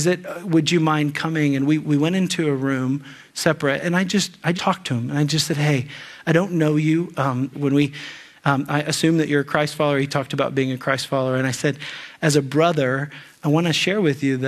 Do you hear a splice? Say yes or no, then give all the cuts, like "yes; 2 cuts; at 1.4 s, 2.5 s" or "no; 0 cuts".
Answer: yes; 2 cuts; at 4.5 s, 7.5 s